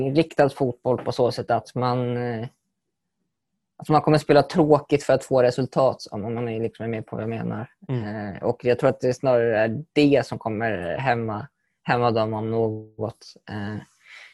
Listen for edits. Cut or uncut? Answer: uncut